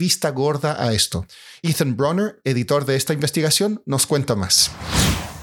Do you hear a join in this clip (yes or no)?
no